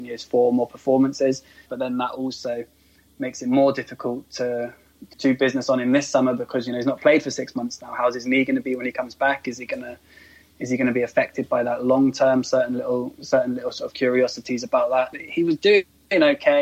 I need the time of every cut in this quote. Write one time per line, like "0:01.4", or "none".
0:01.7
0:05.1
0:15.1